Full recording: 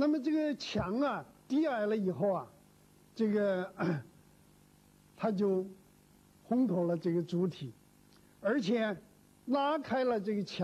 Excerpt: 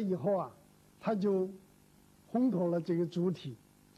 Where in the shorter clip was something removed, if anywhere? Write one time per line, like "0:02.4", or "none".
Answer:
0:00.9